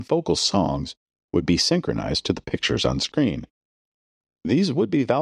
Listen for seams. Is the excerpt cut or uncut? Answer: cut